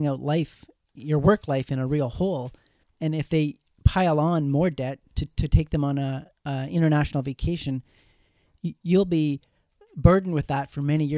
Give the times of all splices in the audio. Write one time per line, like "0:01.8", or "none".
0:02.8